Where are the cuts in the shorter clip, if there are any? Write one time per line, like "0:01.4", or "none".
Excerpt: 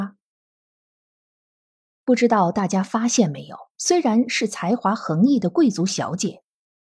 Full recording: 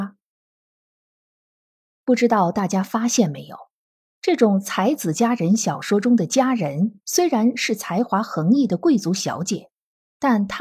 0:03.7